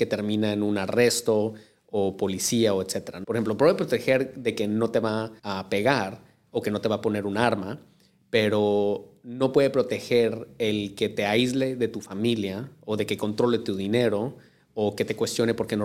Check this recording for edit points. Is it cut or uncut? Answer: cut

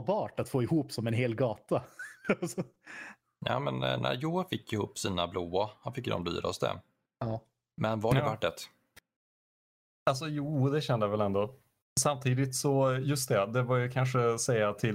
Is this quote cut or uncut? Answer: uncut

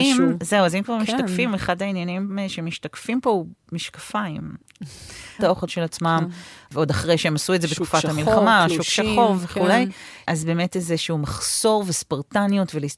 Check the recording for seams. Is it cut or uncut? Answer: cut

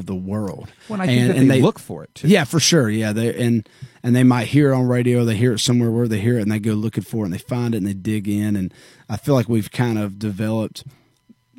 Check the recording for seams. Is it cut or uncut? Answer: uncut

